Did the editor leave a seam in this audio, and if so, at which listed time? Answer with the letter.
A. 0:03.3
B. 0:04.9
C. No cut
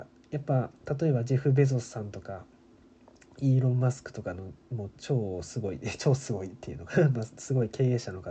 B